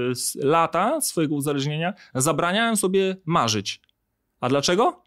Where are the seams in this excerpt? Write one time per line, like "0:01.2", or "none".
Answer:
none